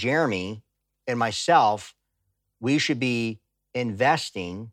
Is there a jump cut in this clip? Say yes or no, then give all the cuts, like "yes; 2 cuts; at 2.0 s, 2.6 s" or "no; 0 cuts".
no; 0 cuts